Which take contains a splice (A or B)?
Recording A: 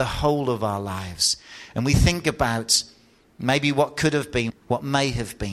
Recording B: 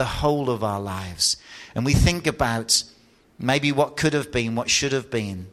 A